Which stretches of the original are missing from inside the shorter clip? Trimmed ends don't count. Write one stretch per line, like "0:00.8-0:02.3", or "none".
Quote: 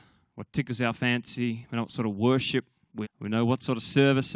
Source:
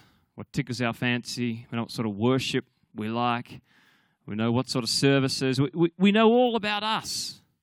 0:03.0-0:04.1